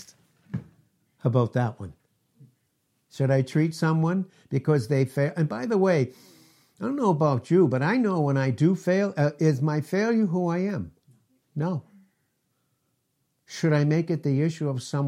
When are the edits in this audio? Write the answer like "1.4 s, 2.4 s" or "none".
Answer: none